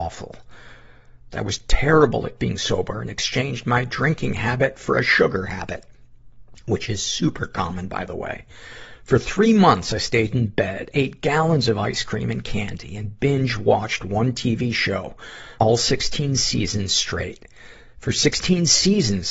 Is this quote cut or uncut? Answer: cut